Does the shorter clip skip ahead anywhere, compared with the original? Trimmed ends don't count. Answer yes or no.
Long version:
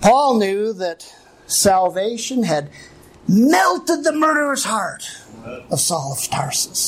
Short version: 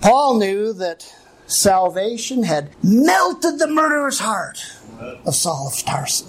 yes